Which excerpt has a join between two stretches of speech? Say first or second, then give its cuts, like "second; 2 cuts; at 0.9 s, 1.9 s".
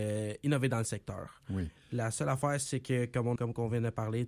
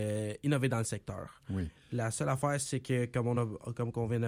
first; 1 cut; at 3.4 s